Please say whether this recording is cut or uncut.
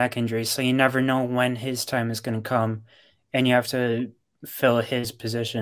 uncut